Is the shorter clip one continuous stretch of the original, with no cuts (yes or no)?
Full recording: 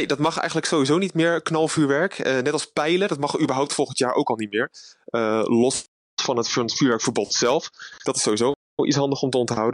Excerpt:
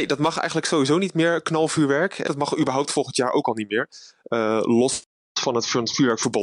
no